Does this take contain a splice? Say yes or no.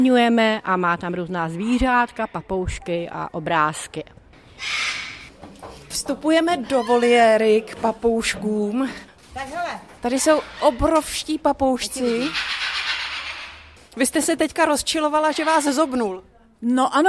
yes